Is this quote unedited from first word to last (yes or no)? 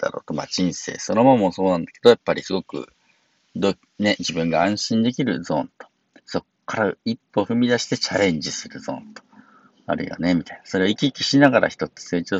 yes